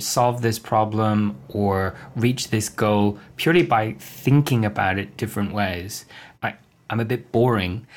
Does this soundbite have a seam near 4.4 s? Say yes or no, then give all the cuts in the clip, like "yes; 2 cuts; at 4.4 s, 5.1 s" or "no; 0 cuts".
no; 1 cut; at 6.3 s